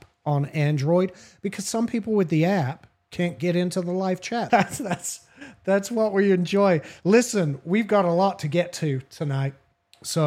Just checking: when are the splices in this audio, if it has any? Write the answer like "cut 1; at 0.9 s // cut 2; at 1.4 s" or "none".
cut 1; at 4.5 s